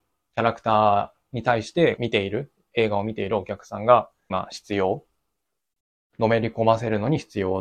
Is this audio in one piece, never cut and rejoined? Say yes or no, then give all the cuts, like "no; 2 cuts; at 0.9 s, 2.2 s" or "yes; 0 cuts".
no; 2 cuts; at 2.0 s, 4.3 s